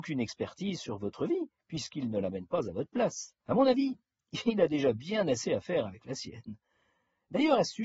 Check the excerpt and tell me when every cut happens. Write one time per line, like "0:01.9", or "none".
0:03.4